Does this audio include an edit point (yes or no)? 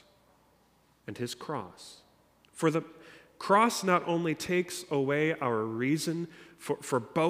yes